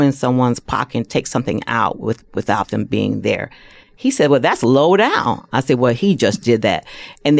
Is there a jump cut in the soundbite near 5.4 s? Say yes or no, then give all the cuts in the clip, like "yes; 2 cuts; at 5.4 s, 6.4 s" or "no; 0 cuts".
no; 0 cuts